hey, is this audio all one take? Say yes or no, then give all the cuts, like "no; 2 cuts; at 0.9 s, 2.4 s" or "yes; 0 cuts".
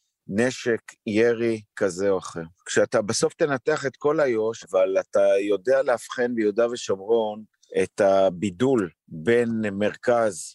no; 2 cuts; at 2.6 s, 4.6 s